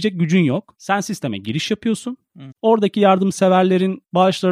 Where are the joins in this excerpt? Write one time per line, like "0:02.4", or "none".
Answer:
0:02.5